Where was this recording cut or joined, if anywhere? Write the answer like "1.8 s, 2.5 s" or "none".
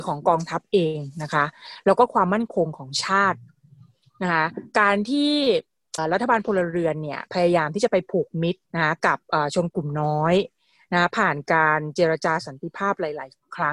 6.0 s, 8.7 s